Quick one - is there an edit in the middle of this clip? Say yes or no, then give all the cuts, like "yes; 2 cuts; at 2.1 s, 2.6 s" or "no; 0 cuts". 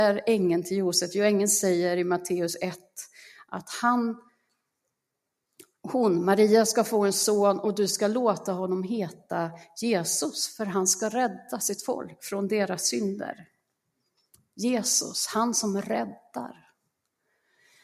no; 0 cuts